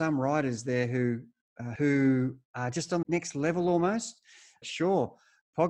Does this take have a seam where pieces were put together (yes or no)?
yes